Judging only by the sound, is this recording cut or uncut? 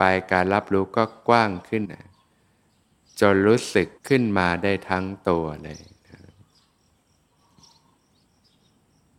cut